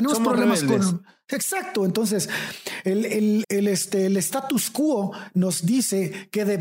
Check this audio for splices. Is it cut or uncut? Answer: cut